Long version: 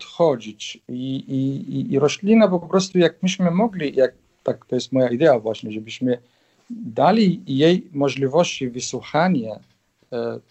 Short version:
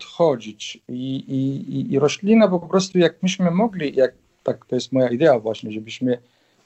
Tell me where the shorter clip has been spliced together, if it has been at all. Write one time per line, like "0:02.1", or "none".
none